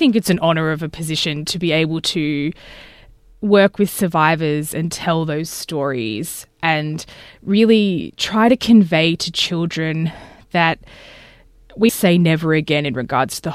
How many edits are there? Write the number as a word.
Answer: one